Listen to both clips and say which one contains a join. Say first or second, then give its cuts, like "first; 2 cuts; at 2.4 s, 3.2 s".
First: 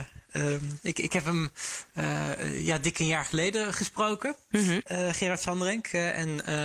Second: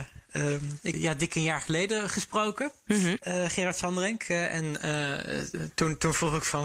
second; 1 cut; at 0.9 s